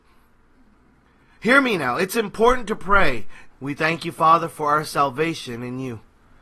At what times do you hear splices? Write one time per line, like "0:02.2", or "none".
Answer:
0:03.5